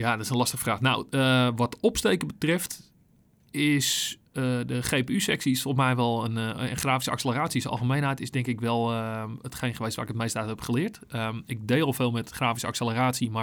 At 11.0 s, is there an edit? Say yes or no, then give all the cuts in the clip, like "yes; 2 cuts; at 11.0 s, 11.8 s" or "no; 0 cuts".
no; 0 cuts